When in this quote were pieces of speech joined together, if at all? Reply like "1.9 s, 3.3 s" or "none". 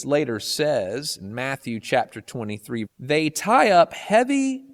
2.9 s